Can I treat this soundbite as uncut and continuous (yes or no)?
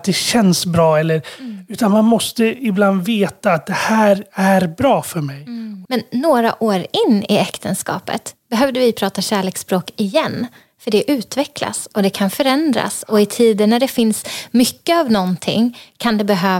no